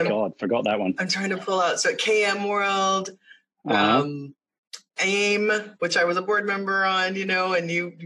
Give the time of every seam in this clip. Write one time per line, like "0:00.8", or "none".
none